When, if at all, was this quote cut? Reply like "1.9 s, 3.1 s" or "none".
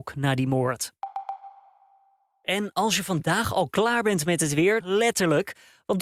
4.8 s